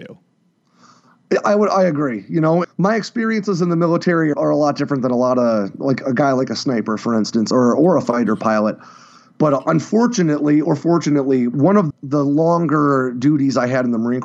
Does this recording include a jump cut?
yes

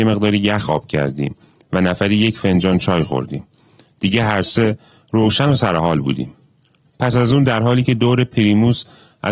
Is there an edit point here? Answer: yes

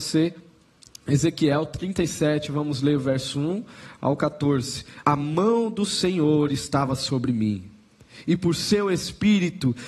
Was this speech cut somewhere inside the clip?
yes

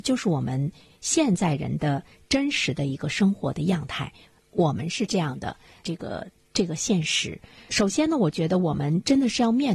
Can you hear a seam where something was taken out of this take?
yes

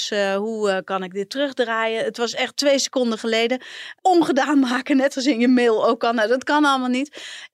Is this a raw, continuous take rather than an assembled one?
yes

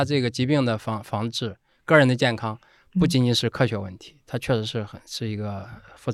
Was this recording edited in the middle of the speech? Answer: no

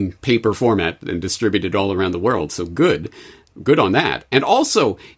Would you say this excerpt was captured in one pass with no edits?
yes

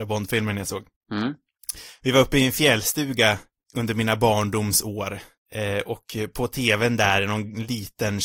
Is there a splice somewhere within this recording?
no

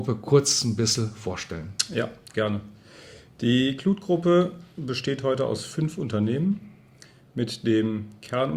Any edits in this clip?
no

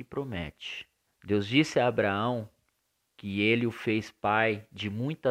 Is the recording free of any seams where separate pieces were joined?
no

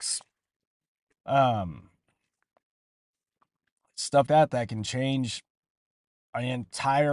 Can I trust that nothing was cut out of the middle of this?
no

